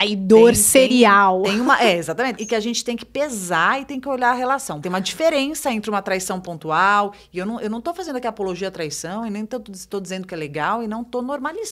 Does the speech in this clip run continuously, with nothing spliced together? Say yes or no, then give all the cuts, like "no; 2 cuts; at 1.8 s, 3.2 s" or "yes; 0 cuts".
no; 2 cuts; at 2.4 s, 4.8 s